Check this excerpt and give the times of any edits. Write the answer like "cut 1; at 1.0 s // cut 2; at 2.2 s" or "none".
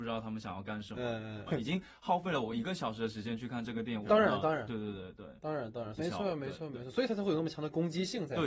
cut 1; at 1.5 s // cut 2; at 4.0 s // cut 3; at 6.0 s